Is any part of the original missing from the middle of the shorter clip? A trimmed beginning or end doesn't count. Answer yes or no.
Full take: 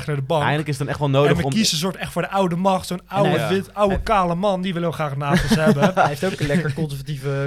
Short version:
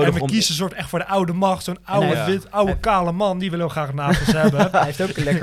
no